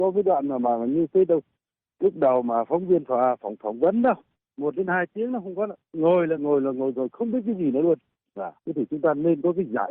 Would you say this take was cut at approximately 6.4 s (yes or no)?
yes